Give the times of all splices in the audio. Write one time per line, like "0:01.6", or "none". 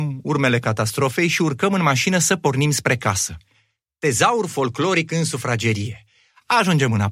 none